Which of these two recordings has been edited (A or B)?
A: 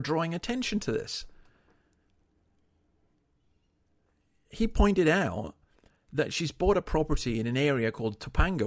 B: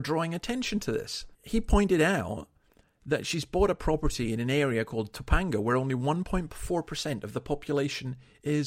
B